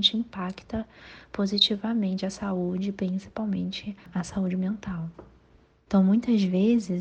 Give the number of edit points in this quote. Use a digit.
1